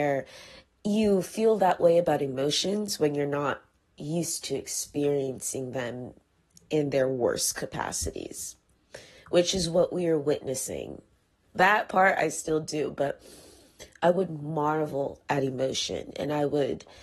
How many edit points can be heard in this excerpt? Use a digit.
1